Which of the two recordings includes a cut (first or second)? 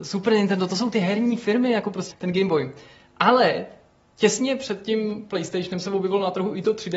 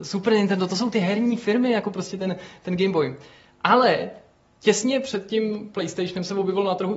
first